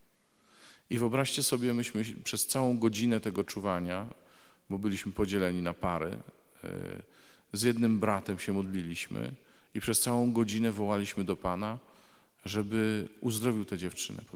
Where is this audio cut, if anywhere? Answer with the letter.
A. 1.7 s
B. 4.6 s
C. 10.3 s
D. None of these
D